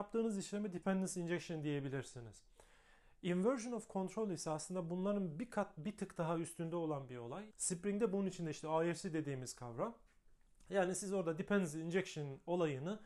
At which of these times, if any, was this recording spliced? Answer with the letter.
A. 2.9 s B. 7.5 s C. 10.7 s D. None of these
B